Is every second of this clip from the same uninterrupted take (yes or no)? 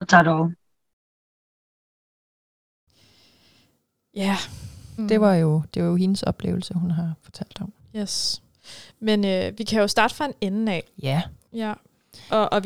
no